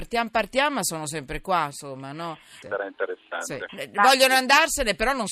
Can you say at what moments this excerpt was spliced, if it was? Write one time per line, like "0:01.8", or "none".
0:02.6
0:03.7